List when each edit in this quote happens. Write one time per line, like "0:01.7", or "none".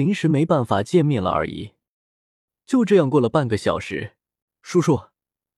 0:04.4